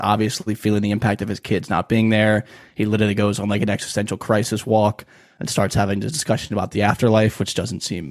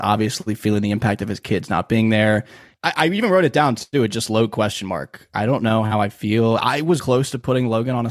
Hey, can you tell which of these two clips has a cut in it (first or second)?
second